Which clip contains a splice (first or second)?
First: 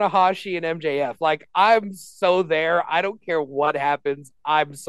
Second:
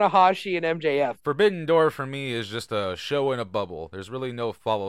second